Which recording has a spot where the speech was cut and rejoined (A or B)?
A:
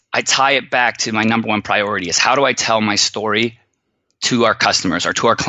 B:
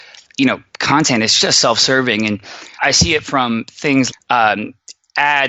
B